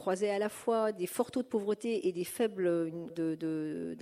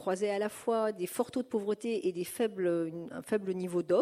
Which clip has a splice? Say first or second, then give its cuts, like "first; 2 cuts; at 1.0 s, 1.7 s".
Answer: first; 1 cut; at 3.1 s